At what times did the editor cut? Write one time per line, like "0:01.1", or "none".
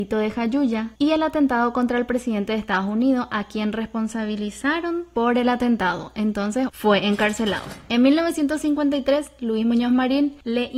0:06.7